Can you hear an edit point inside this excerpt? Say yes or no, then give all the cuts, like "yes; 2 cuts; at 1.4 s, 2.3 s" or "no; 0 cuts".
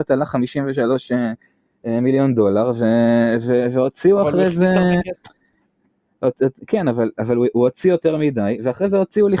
no; 0 cuts